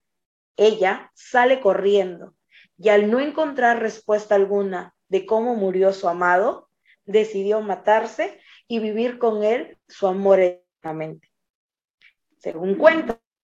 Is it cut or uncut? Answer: uncut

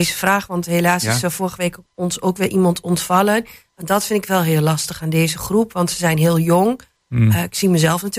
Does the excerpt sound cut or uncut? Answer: uncut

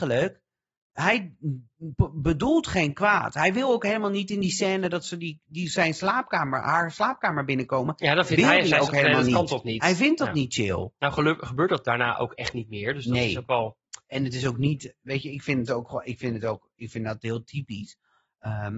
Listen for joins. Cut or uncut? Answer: uncut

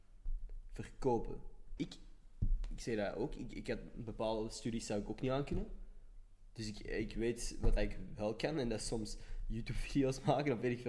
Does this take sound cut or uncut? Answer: cut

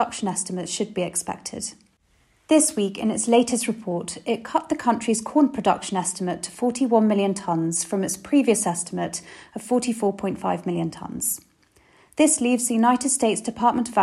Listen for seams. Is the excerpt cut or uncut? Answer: uncut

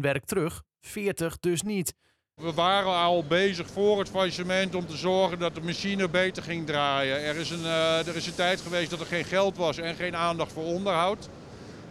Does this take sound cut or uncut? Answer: cut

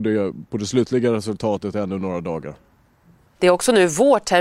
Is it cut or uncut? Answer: cut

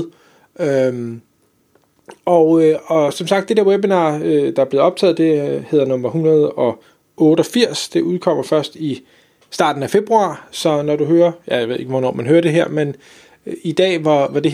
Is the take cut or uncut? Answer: uncut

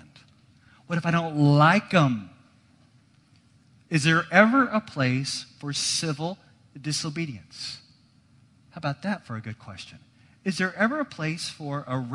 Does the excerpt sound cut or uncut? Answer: uncut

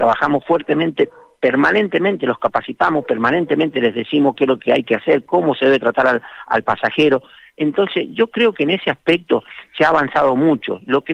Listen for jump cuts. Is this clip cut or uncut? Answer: uncut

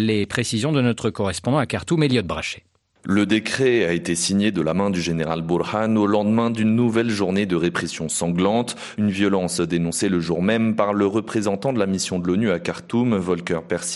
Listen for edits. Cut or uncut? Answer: cut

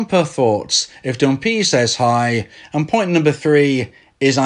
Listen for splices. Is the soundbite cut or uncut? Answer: uncut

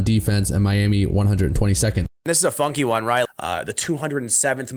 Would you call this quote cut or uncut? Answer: cut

